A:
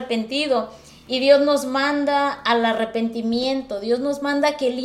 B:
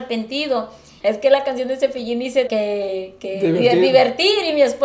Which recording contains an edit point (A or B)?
B